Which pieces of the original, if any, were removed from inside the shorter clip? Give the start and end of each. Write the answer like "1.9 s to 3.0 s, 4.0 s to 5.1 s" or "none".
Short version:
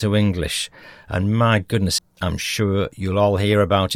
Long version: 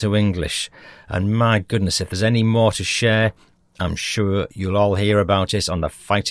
2.0 s to 3.6 s